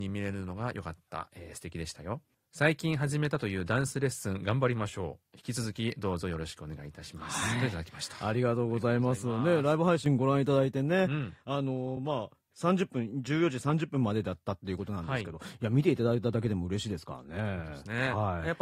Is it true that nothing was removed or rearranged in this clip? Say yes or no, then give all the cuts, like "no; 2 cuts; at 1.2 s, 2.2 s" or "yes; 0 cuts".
yes; 0 cuts